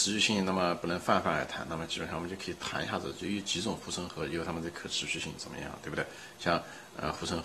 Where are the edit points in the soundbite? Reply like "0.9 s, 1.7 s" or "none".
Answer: none

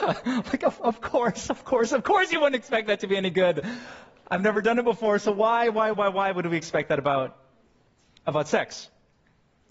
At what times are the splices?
5.9 s

